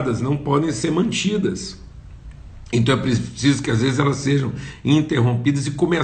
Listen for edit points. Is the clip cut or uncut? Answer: uncut